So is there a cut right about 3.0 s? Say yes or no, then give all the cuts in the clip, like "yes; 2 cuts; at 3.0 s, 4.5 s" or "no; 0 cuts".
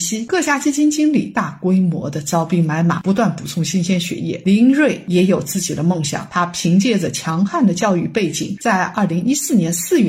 no; 1 cut; at 8.6 s